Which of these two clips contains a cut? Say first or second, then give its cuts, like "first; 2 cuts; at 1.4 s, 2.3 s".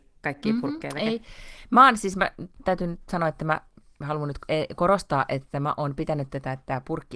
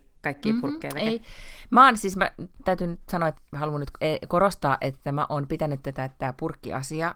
second; 1 cut; at 3.4 s